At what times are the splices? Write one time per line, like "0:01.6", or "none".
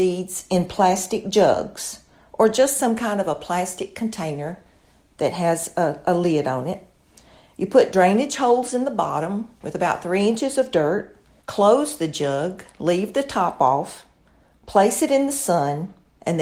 0:11.4